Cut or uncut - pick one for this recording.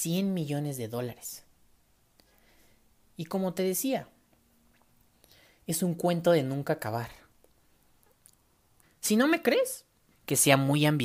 cut